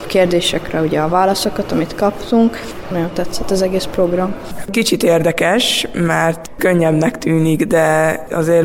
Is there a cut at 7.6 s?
no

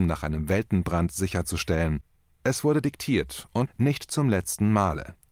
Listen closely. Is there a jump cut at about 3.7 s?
yes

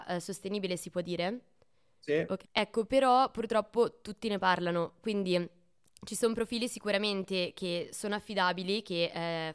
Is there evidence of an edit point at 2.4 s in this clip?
yes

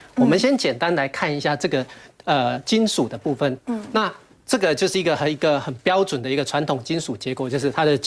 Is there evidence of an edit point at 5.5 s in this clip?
no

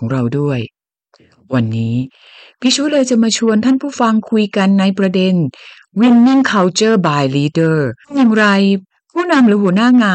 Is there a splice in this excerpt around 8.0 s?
yes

